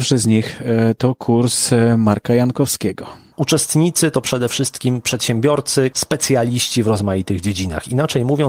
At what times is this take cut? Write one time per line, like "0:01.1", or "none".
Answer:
0:03.3
0:05.9